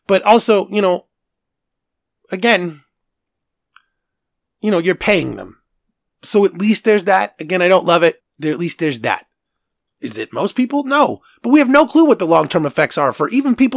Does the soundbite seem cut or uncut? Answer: cut